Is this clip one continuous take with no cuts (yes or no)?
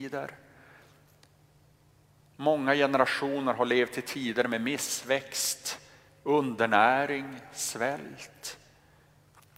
yes